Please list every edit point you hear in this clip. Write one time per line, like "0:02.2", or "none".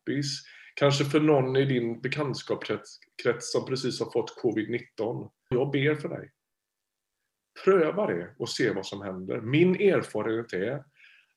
0:05.5